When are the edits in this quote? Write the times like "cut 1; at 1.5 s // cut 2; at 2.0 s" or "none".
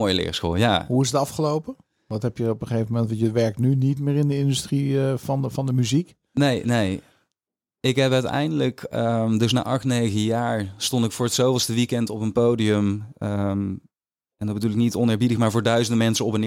none

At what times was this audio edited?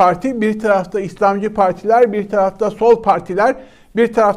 none

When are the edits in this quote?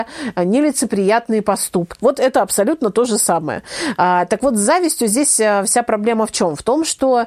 cut 1; at 2.0 s

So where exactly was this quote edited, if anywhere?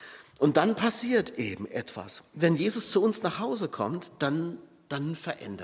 none

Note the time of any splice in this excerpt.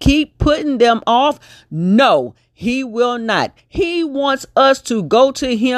cut 1; at 3.6 s

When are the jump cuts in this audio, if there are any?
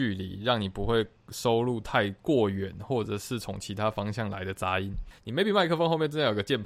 none

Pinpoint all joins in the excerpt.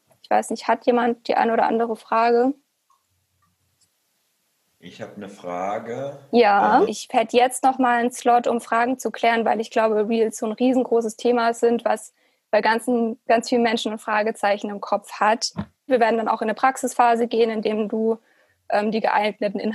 cut 1; at 6.8 s // cut 2; at 15.9 s

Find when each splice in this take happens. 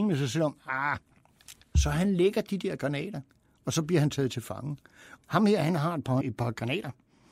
cut 1; at 5.2 s // cut 2; at 6.2 s

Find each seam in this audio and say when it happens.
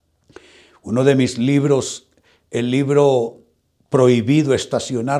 none

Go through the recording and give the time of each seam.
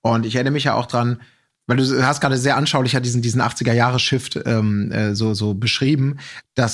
none

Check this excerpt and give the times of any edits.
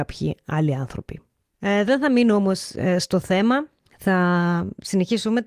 none

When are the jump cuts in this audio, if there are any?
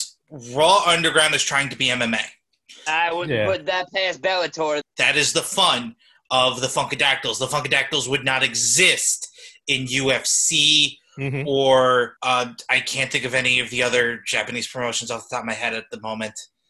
cut 1; at 2.9 s // cut 2; at 4.8 s // cut 3; at 12.2 s

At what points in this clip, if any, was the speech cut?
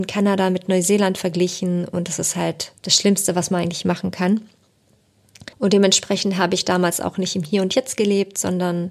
cut 1; at 2.8 s // cut 2; at 5.5 s

